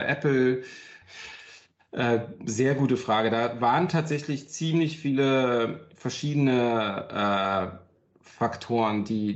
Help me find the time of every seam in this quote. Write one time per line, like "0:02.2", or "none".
0:01.0